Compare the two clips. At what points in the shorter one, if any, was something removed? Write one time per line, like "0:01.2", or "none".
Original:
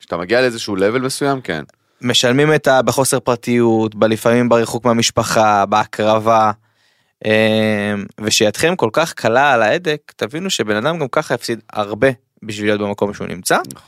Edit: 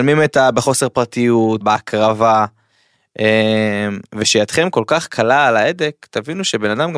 0:01.6